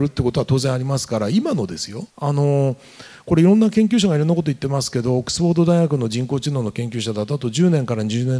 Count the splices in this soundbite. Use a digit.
1